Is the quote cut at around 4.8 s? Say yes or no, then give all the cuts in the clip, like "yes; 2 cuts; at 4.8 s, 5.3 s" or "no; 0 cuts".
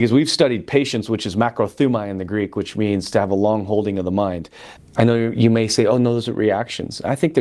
yes; 1 cut; at 4.8 s